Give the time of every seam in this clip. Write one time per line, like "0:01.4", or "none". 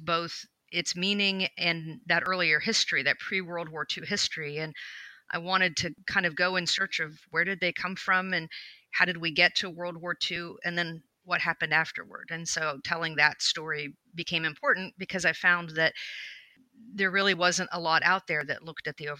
none